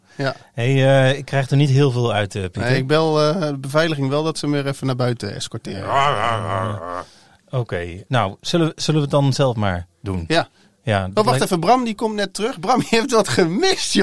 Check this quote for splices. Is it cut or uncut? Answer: uncut